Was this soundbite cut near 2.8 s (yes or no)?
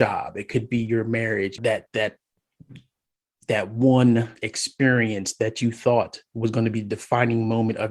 no